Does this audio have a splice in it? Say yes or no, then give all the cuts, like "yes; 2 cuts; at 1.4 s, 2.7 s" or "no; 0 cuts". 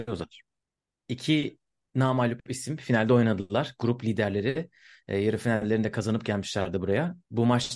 yes; 1 cut; at 1.0 s